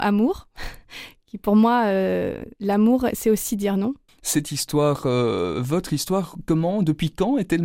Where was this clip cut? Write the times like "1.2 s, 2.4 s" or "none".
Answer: 2.5 s, 4.1 s